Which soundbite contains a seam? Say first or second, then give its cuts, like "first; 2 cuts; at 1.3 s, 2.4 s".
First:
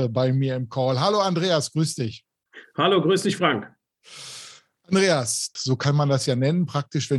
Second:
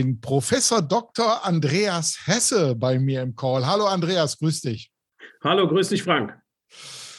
first; 1 cut; at 5.6 s